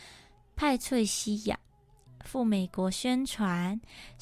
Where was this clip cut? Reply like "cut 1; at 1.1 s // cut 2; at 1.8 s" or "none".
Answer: cut 1; at 2.1 s